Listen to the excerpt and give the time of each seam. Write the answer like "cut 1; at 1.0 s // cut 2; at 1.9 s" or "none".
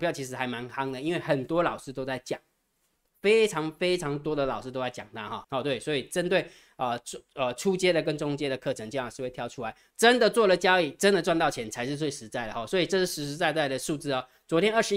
cut 1; at 5.4 s // cut 2; at 9.9 s